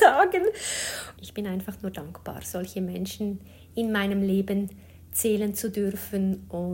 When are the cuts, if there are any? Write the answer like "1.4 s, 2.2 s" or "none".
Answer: 1.2 s